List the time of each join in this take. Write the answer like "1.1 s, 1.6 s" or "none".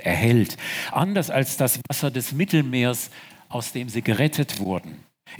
none